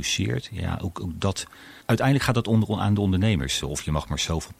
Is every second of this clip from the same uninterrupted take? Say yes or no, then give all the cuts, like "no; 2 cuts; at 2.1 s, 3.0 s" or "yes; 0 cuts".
no; 2 cuts; at 1.8 s, 3.6 s